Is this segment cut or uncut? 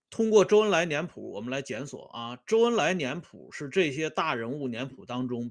uncut